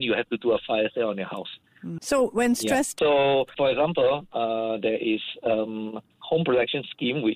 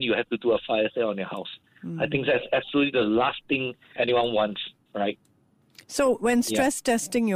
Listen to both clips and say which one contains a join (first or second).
first